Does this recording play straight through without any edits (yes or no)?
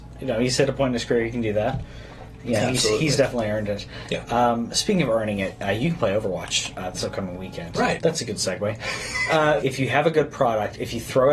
no